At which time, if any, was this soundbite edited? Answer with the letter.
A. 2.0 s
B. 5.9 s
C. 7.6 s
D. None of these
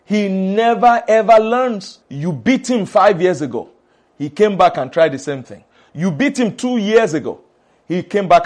A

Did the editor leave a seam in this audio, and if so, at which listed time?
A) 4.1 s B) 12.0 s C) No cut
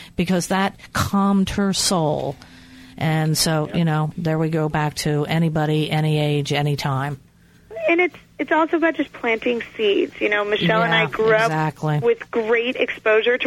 A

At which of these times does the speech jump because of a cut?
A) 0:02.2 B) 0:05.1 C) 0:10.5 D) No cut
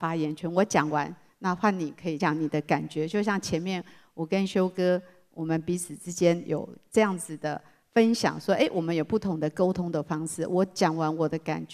A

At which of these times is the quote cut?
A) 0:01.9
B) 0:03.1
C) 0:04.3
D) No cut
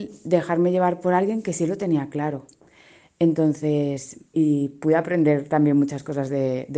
C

